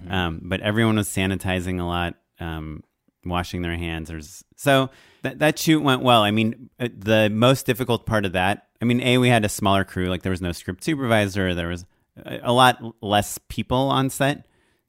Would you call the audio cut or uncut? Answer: uncut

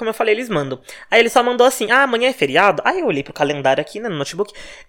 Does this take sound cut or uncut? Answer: uncut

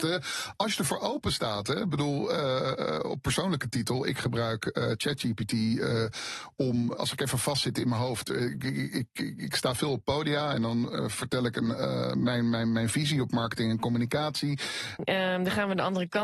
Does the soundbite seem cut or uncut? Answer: cut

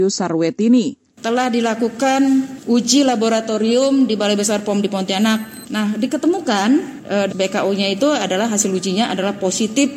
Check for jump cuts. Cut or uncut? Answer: cut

